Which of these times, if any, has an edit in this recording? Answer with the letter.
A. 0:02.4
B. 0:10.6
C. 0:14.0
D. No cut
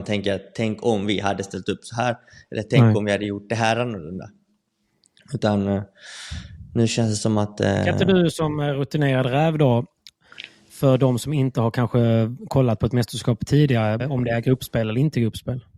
C